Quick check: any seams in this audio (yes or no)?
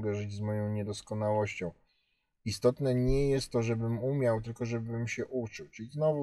no